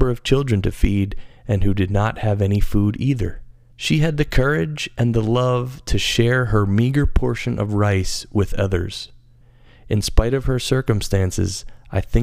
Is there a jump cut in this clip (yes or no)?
yes